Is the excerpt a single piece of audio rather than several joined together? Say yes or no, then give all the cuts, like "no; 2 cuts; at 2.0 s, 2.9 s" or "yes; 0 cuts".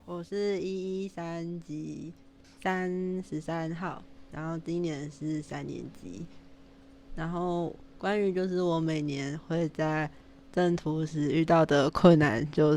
yes; 0 cuts